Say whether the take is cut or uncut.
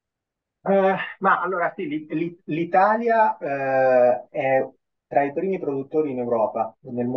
uncut